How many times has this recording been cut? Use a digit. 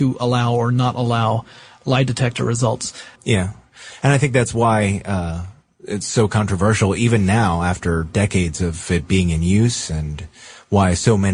1